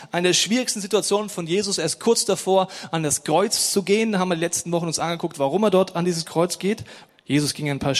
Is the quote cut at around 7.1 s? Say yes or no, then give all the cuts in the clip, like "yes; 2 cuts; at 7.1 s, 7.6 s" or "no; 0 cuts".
yes; 1 cut; at 7.1 s